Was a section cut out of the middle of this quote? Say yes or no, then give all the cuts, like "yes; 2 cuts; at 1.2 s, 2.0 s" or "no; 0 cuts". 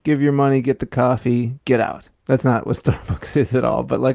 yes; 1 cut; at 2.2 s